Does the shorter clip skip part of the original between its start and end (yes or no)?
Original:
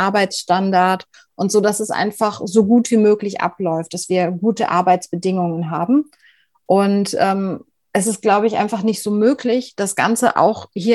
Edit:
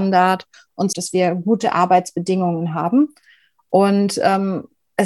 yes